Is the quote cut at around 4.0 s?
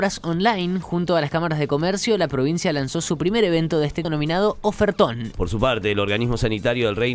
yes; 2 cuts; at 4.0 s, 5.3 s

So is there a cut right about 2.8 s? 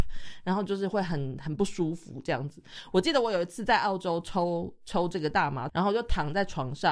no; 1 cut; at 5.7 s

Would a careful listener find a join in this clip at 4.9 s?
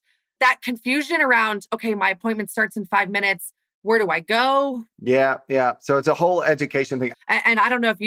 yes; 2 cuts; at 4.9 s, 7.1 s

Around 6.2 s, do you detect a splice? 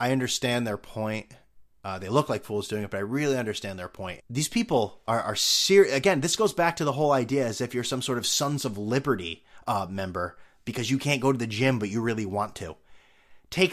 no; 1 cut; at 4.2 s

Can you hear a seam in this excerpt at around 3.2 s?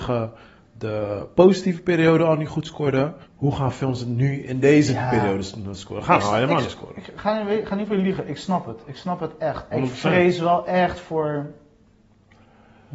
yes; 2 cuts; at 3.2 s, 9.7 s

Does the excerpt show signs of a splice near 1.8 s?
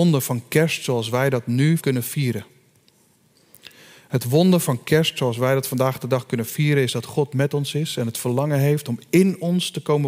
yes; 1 cut; at 1.8 s

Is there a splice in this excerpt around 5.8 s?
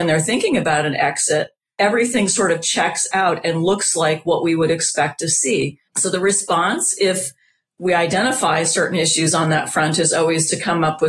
yes; 1 cut; at 5.8 s

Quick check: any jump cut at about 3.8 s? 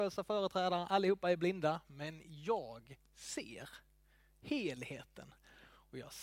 no; 0 cuts

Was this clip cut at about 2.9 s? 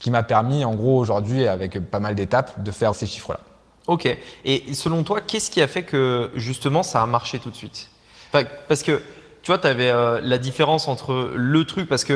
yes; 1 cut; at 2.9 s

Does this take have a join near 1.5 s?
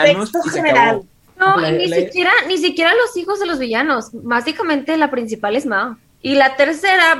yes; 2 cuts; at 1.5 s, 6.0 s

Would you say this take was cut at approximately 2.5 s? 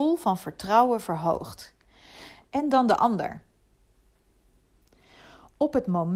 yes; 1 cut; at 2.5 s

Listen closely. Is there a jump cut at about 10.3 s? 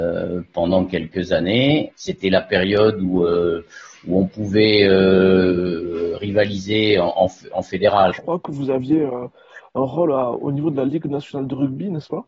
no; 2 cuts; at 1.9 s, 8.1 s

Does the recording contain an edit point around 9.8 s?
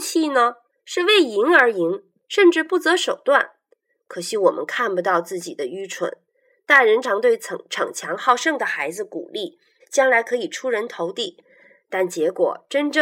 yes; 2 cuts; at 7.0 s, 9.8 s

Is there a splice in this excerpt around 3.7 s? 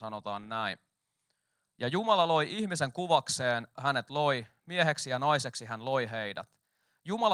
yes; 1 cut; at 3.7 s

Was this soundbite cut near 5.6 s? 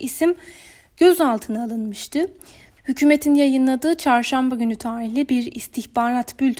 no; 1 cut; at 2.7 s

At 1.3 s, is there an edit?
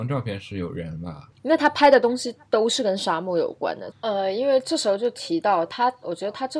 yes; 2 cuts; at 1.3 s, 3.9 s

